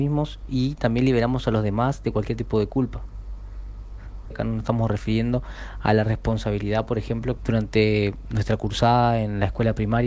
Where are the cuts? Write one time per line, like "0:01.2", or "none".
0:04.3
0:07.4

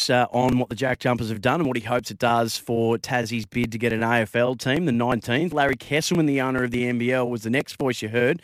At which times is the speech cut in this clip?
none

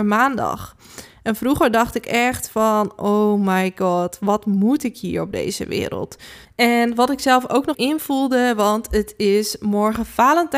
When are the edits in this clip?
0:06.4
0:07.7

